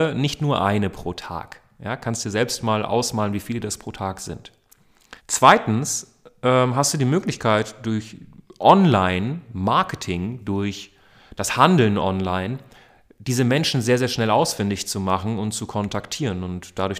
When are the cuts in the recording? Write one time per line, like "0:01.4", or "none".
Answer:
0:05.2